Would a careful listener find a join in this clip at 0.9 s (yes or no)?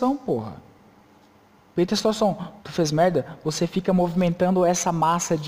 no